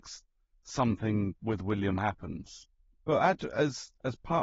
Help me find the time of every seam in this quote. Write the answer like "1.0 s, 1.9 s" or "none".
none